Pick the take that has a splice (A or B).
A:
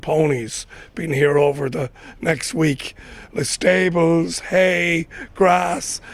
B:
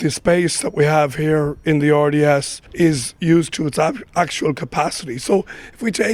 B